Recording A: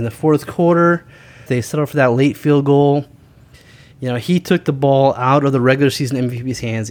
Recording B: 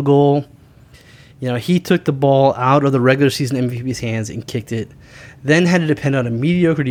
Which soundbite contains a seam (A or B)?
A